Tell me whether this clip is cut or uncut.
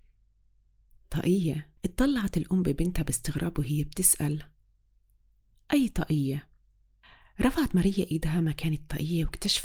cut